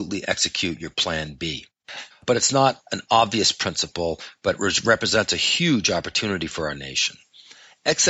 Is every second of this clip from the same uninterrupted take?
no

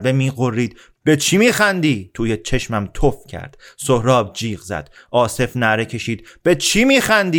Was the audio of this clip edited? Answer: no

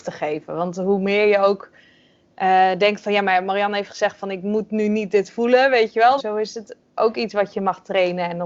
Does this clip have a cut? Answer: yes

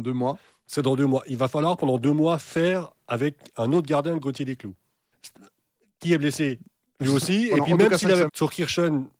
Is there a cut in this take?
yes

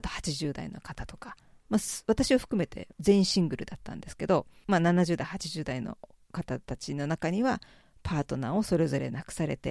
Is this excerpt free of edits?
yes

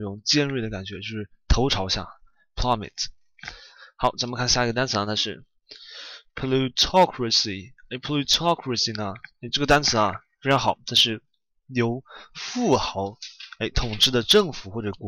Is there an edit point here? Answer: no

